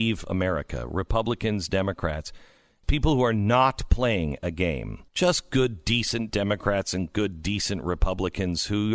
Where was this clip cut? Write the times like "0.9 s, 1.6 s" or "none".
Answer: 2.8 s, 5.1 s